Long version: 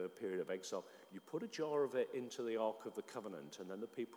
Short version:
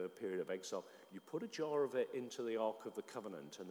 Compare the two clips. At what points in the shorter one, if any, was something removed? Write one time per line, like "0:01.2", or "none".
none